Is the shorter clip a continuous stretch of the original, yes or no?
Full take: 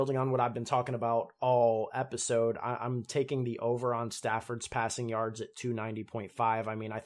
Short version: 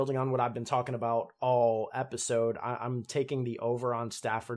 yes